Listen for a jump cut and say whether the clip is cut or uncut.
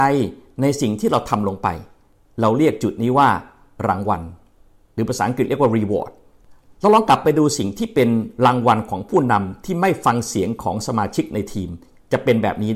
uncut